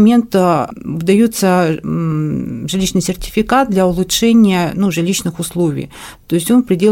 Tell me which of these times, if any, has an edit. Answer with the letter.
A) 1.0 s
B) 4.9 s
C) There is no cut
C